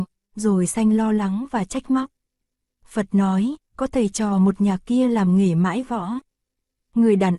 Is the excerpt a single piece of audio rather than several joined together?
yes; 0 cuts

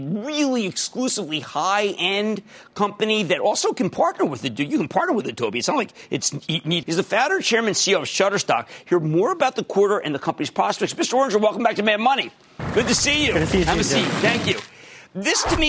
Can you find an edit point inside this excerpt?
yes; 1 cut; at 6.8 s

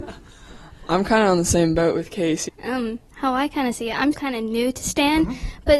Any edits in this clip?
yes; 2 cuts; at 2.5 s, 4.1 s

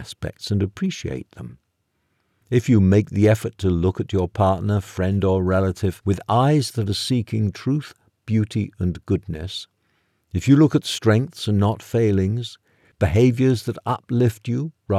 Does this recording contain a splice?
no; 0 cuts

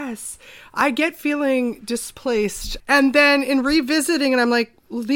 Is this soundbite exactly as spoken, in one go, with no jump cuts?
no; 1 cut; at 2.8 s

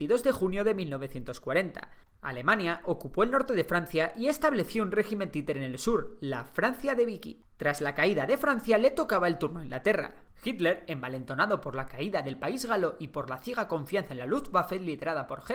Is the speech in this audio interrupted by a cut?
no; 0 cuts

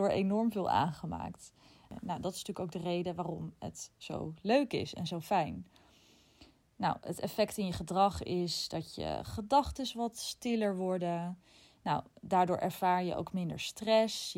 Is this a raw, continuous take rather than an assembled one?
yes; 0 cuts

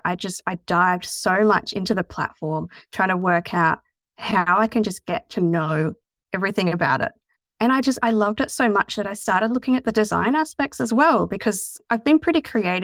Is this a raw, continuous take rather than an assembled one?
yes; 0 cuts

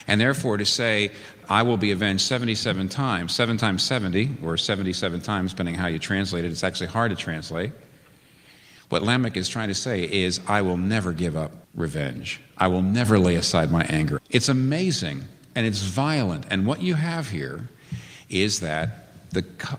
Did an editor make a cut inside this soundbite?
yes; 2 cuts; at 11.6 s, 14.2 s

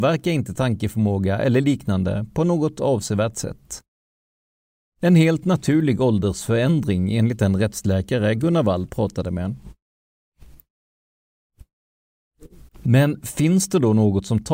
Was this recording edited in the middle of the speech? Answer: yes; 1 cut; at 12.7 s

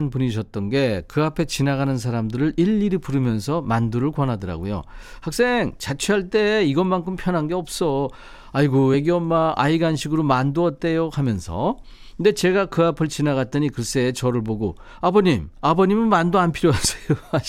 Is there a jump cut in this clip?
no; 0 cuts

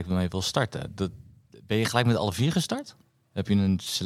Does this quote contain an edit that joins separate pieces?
no; 0 cuts

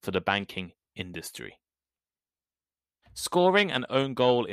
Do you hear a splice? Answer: yes; 1 cut; at 3.0 s

